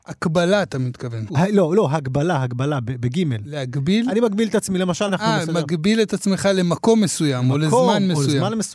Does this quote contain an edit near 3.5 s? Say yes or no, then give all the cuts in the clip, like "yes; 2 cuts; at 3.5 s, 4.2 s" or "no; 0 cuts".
no; 2 cuts; at 1.3 s, 5.1 s